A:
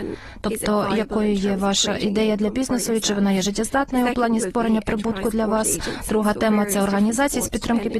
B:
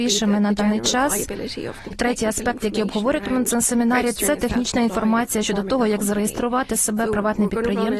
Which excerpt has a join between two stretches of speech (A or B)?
B